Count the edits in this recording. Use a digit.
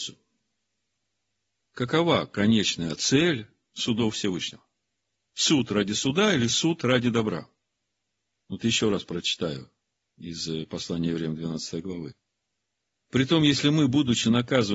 1